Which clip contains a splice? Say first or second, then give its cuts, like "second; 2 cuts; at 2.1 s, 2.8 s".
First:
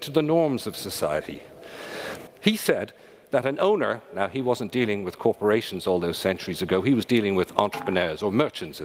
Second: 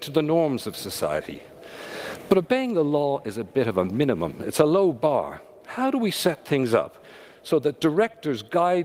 first; 1 cut; at 2.3 s